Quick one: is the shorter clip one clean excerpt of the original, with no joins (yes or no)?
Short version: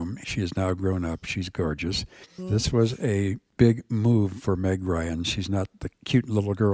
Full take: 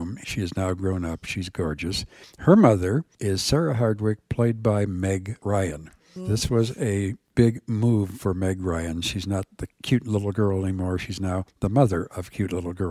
no